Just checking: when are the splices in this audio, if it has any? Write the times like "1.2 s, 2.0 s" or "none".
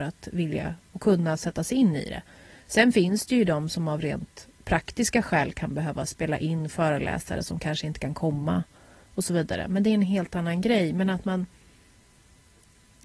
none